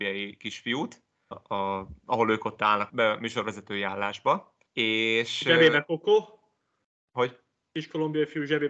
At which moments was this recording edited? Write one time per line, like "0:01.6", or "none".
0:01.3
0:02.9
0:04.7